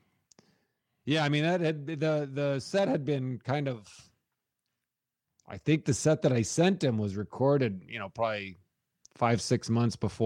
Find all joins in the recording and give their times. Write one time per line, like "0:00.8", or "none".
none